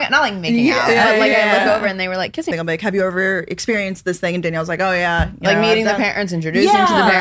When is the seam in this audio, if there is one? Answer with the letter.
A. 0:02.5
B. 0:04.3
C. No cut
A